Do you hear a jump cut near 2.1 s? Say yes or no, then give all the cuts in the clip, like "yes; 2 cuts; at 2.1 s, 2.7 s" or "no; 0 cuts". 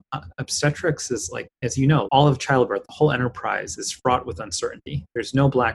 yes; 1 cut; at 2.1 s